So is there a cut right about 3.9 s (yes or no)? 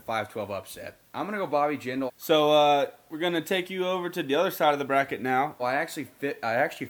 no